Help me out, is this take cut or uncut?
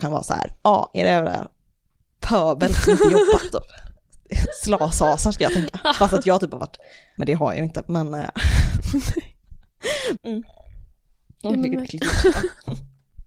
cut